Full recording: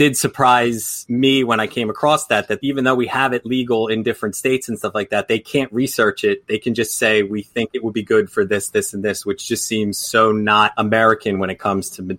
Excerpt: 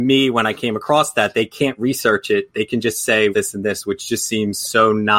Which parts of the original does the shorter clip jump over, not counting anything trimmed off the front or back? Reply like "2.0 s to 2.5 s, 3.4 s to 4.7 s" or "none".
2.5 s to 5.3 s, 7.2 s to 8.7 s